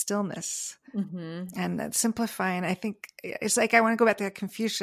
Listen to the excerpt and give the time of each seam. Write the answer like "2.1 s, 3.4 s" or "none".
none